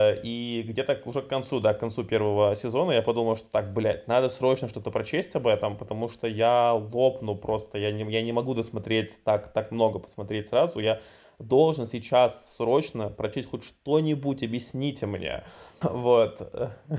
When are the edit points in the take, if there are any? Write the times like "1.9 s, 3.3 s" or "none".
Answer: 15.8 s